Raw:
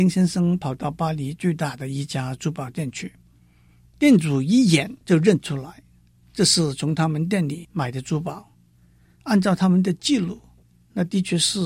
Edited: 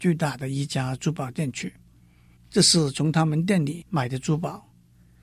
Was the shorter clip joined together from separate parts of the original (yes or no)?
yes